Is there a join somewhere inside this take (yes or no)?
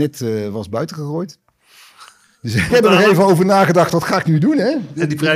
yes